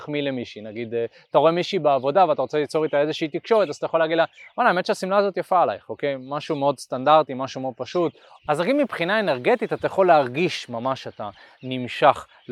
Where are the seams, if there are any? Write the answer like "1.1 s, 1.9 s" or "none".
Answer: 8.4 s